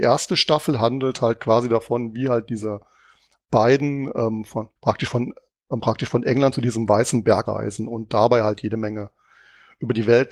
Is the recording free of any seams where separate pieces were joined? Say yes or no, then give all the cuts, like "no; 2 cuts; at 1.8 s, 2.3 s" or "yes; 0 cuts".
no; 2 cuts; at 4.8 s, 7.5 s